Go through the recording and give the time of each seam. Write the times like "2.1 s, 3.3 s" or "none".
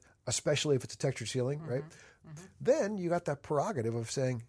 2.2 s